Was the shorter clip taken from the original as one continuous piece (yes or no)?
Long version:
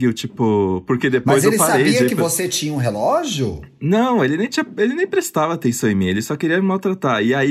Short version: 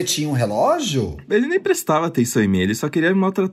no